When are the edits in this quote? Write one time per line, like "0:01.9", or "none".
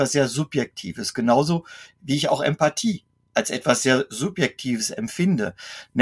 none